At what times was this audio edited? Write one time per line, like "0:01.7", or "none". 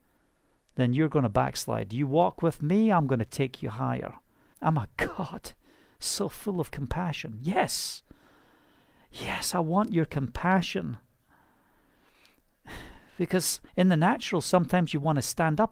0:04.5
0:13.7